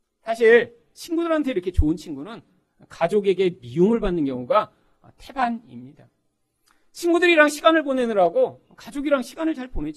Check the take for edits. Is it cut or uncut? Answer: uncut